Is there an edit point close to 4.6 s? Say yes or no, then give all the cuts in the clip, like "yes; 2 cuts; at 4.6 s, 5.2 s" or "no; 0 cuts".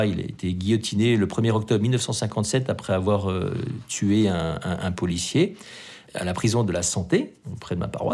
no; 0 cuts